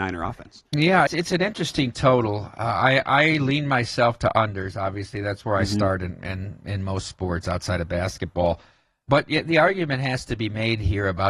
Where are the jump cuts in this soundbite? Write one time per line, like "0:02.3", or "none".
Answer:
0:01.1
0:09.0